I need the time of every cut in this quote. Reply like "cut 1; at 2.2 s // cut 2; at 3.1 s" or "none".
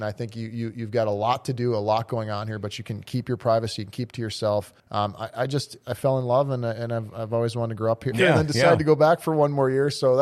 cut 1; at 4.8 s // cut 2; at 8.1 s